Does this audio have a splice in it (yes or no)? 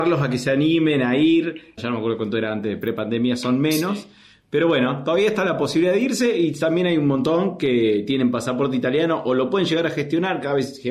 yes